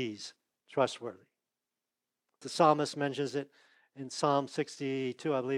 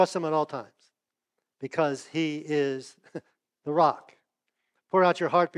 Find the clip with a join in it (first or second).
first